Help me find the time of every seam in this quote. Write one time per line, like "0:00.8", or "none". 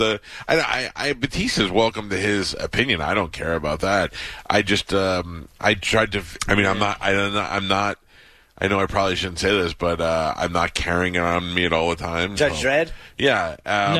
0:06.4
0:12.4